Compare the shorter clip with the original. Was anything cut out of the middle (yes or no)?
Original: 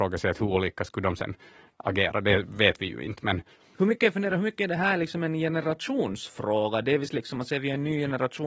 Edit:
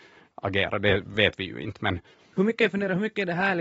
no